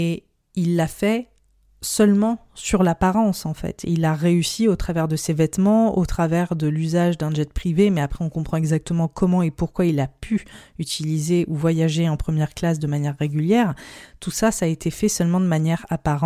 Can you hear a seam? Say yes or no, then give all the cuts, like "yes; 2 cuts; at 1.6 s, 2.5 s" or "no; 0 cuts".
no; 0 cuts